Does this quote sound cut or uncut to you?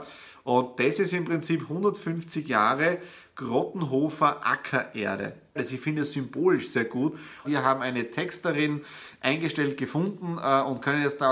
cut